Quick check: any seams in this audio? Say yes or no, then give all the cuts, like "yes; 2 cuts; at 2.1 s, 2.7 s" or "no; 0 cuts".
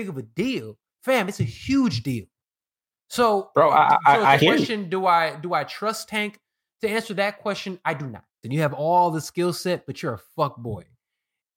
yes; 2 cuts; at 4.4 s, 8.4 s